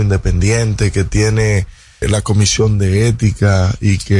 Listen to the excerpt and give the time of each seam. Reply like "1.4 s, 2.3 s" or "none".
2.0 s